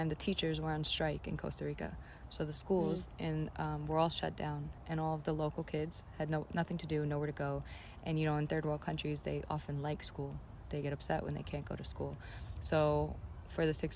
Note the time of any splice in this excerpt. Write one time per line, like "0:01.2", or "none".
none